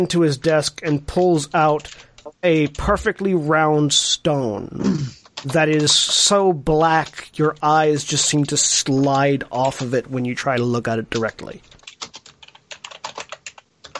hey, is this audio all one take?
yes; 0 cuts

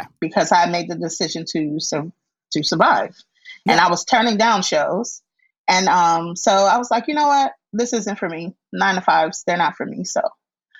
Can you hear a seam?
no; 0 cuts

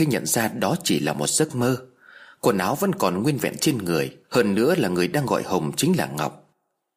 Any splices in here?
yes; 1 cut; at 4.2 s

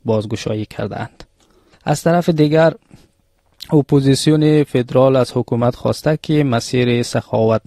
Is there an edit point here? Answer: yes; 1 cut; at 1.7 s

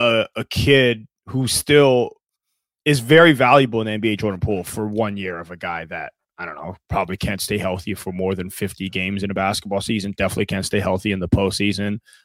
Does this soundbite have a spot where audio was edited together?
no; 0 cuts

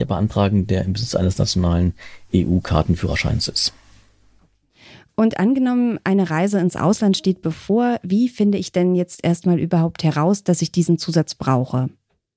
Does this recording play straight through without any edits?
yes; 0 cuts

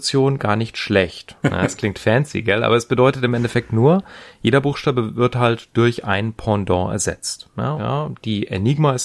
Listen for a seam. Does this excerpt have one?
yes; 2 cuts; at 1.4 s, 7.8 s

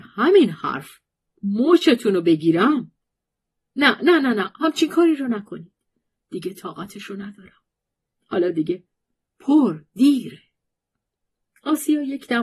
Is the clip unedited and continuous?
yes; 0 cuts

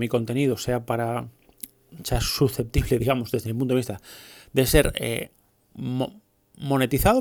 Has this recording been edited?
no; 0 cuts

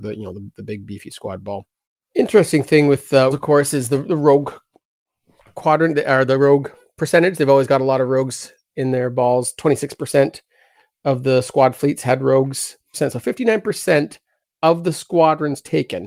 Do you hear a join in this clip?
yes; 2 cuts; at 3.3 s, 12.9 s

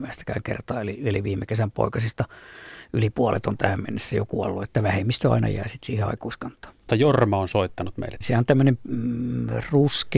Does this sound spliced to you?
yes; 2 cuts; at 6.9 s, 8.2 s

